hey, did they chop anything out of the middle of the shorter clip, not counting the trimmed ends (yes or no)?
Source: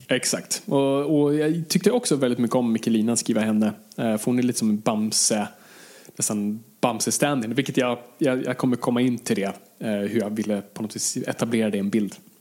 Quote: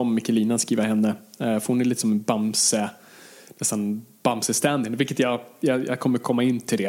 no